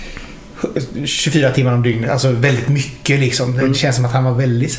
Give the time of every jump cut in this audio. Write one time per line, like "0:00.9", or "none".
none